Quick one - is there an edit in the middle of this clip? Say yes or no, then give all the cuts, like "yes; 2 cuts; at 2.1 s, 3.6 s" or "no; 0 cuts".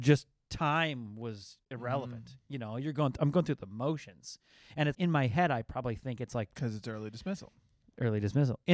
yes; 1 cut; at 4.9 s